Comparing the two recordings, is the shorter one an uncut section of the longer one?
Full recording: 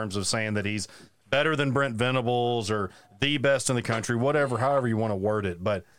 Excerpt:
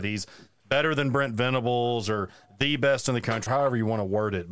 no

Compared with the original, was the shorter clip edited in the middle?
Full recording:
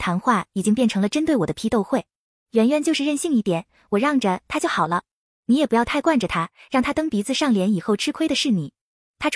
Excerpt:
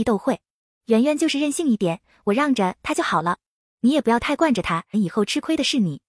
yes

